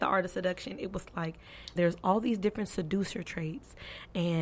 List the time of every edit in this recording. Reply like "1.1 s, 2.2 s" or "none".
1.8 s